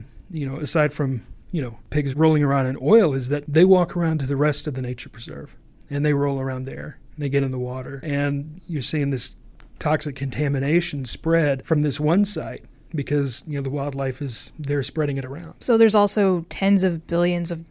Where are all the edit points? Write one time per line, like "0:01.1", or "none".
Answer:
none